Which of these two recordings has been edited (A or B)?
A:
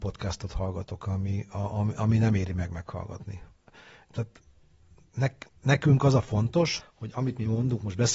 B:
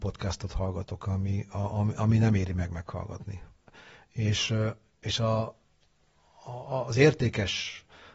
A